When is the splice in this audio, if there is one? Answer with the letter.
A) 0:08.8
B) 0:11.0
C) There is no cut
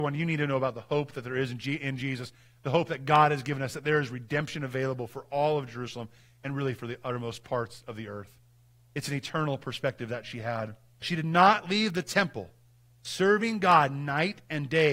B